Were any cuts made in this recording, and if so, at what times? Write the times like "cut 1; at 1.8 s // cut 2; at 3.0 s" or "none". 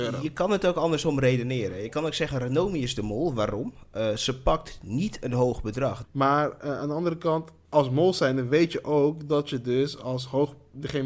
cut 1; at 6.0 s // cut 2; at 7.6 s